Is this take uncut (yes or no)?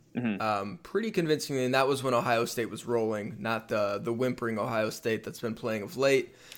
yes